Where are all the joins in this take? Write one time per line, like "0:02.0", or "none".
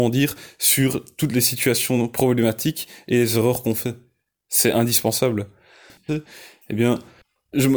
0:06.1